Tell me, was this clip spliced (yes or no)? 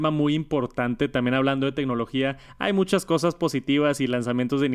no